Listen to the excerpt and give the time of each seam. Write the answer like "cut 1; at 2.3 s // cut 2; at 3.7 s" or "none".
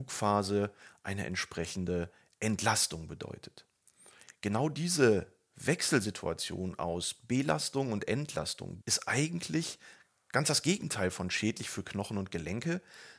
cut 1; at 8.8 s